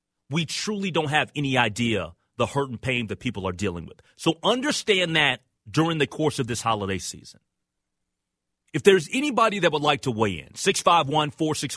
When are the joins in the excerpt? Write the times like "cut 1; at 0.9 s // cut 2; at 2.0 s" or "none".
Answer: none